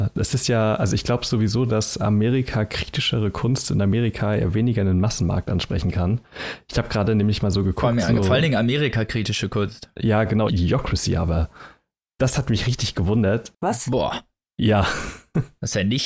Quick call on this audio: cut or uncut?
cut